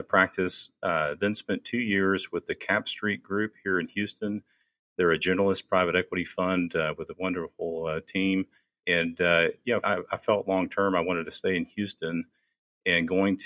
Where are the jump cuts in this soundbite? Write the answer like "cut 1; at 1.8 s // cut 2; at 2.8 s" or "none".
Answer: cut 1; at 8.8 s // cut 2; at 9.8 s